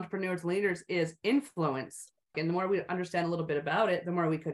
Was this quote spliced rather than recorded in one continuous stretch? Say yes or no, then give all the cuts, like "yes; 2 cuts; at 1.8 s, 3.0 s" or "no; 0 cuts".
yes; 1 cut; at 2.3 s